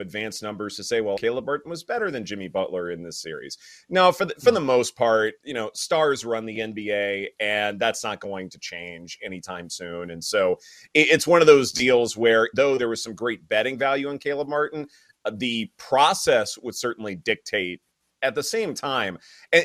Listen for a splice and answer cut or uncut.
cut